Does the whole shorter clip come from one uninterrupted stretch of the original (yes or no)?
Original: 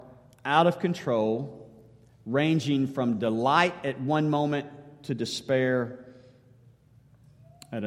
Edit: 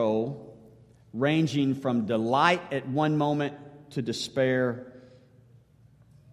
yes